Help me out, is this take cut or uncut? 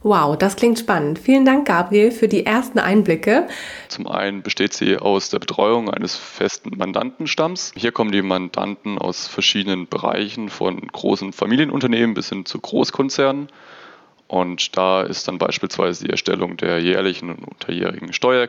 cut